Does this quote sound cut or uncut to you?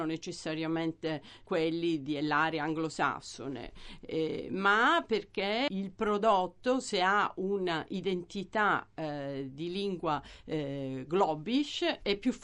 uncut